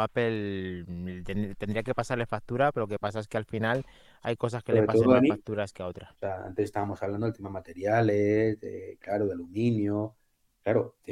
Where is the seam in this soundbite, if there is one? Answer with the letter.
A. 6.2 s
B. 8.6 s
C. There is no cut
A